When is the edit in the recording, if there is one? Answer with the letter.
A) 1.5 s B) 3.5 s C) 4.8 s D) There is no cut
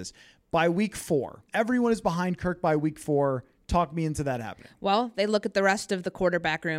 A